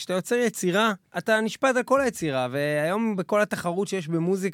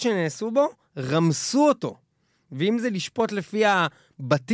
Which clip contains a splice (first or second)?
first